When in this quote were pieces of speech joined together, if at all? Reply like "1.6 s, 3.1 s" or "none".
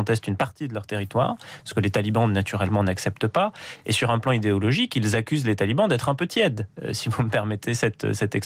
none